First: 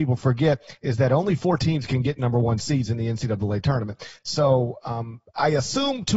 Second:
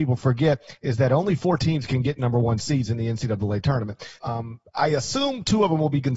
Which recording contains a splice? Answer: second; 1 cut; at 4.2 s

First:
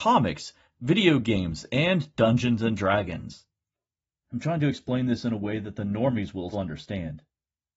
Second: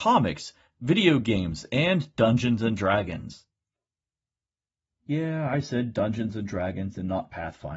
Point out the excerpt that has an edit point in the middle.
first; 2 cuts; at 4.2 s, 6.5 s

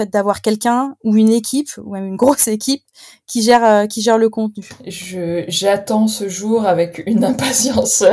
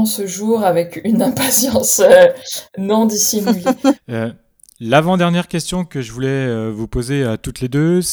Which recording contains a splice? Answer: second; 1 cut; at 4.0 s

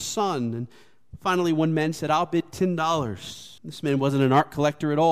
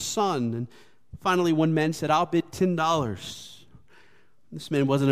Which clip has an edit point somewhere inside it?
first; 1 cut; at 3.6 s

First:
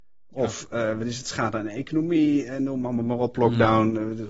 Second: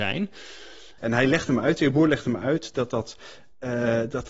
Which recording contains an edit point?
second; 1 cut; at 1.0 s

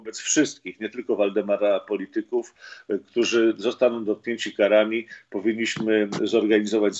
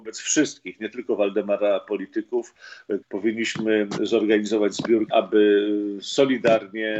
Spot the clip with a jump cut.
second; 2 cuts; at 3.0 s, 5.1 s

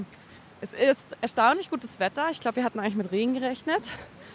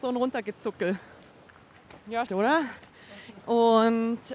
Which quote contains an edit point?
second; 2 cuts; at 2.3 s, 3.4 s

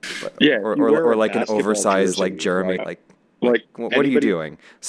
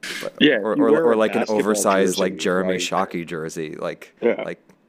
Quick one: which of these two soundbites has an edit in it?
first; 2 cuts; at 2.8 s, 3.9 s

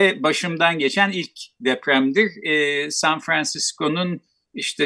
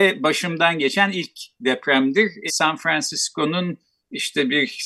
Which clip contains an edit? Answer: second; 1 cut; at 2.5 s

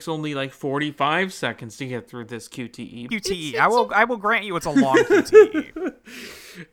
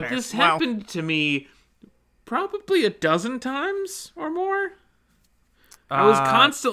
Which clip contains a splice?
first; 1 cut; at 3.1 s

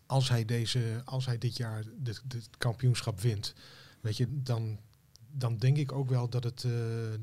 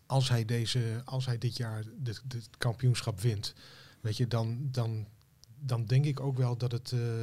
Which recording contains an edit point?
first; 1 cut; at 4.3 s

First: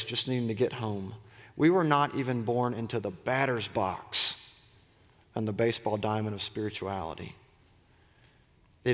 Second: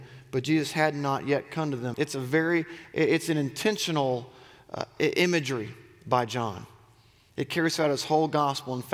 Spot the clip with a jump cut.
second; 1 cut; at 1.9 s

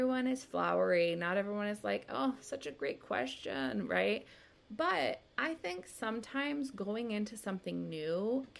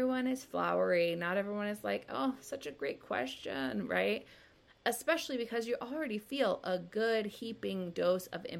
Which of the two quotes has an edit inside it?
second; 1 cut; at 4.7 s

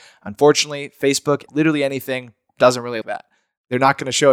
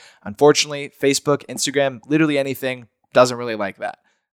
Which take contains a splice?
first; 2 cuts; at 1.5 s, 3.0 s

